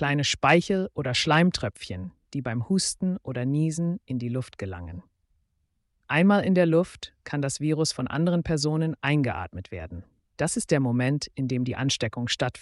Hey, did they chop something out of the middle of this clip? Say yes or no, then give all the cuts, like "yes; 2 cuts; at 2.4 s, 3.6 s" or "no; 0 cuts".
no; 0 cuts